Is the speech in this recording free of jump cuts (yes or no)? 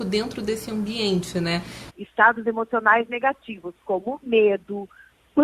no